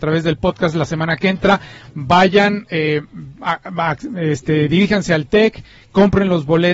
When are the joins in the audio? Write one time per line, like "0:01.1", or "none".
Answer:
none